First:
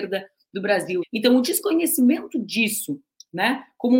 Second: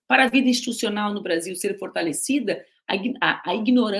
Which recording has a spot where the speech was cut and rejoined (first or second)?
first